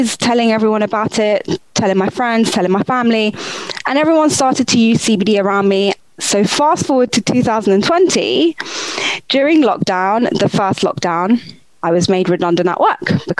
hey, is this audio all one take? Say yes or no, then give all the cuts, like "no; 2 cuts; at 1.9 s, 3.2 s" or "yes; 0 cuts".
yes; 0 cuts